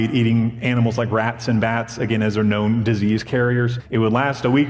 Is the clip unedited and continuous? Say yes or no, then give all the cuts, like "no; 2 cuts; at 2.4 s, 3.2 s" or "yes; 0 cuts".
no; 1 cut; at 3.8 s